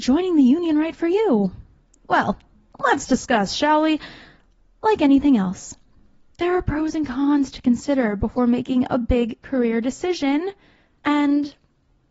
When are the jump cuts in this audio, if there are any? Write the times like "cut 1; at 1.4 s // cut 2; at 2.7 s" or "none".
cut 1; at 11.0 s